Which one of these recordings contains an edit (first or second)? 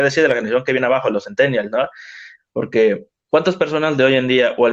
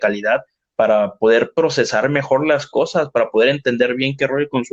first